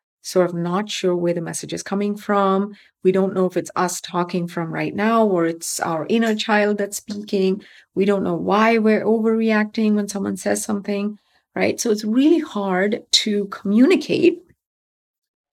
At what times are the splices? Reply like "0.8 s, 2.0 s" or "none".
none

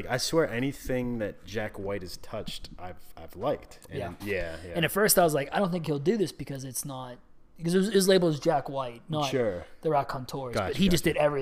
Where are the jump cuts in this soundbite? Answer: 4.2 s

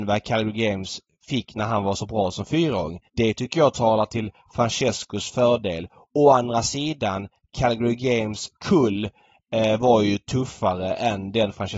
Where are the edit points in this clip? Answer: 3.1 s

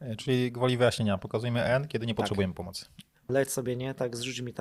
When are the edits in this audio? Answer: 3.3 s

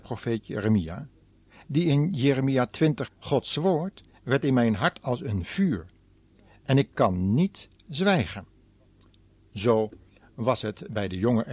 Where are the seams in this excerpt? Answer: 3.1 s

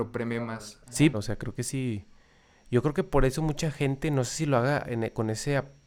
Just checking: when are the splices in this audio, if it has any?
1.1 s

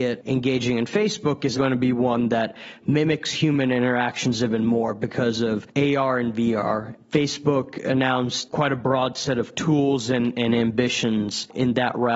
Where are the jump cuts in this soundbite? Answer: 1.5 s

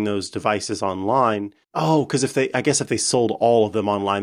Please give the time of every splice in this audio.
1.6 s

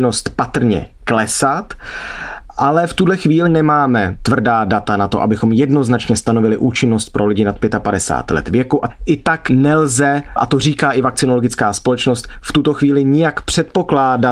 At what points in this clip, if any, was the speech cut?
3.4 s

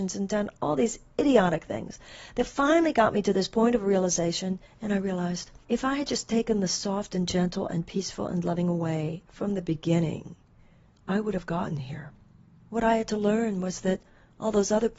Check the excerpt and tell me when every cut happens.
5.6 s, 12.6 s

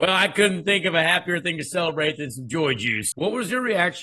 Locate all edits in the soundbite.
3.1 s

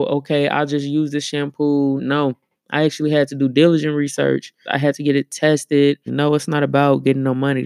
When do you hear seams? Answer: 2.0 s, 4.6 s, 6.1 s

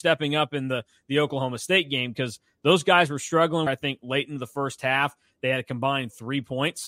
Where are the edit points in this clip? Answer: 3.7 s

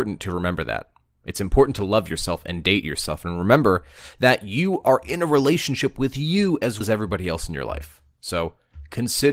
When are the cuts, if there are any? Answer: 6.8 s

